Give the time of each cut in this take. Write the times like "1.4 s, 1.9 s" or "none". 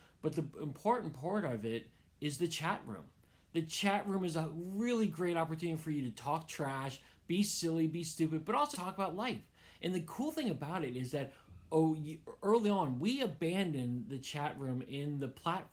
8.7 s

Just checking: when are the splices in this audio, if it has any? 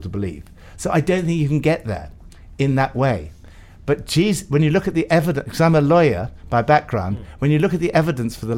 none

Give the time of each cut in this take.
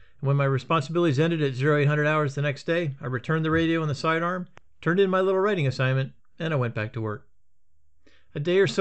none

